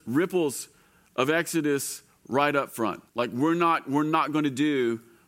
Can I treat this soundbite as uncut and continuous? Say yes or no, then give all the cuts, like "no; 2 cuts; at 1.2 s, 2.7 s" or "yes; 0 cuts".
no; 1 cut; at 3.1 s